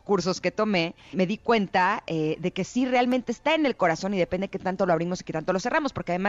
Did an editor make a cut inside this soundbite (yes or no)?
yes